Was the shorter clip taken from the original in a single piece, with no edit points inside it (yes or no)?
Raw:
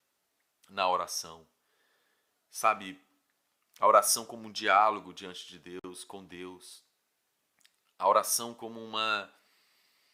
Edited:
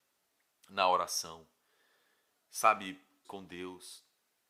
no